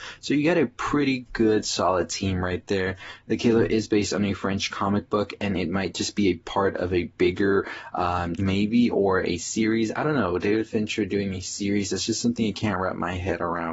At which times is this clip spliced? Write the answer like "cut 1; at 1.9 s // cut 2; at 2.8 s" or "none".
cut 1; at 8.4 s